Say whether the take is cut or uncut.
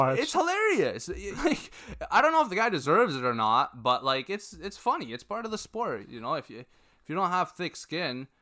cut